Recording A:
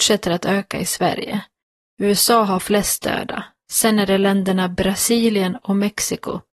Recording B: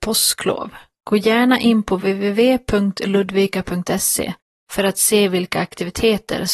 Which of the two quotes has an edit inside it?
A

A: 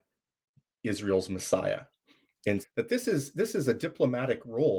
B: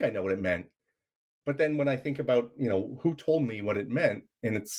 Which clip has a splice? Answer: A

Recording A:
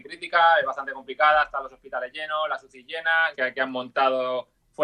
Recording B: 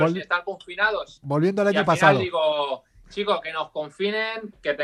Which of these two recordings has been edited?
A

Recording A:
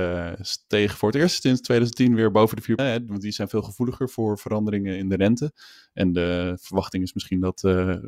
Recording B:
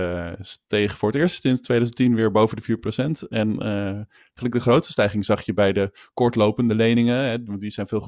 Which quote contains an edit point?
A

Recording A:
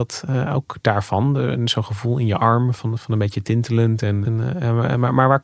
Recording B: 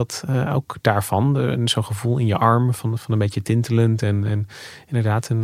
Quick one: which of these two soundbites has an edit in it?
A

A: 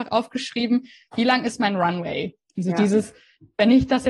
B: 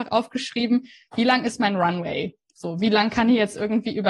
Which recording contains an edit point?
A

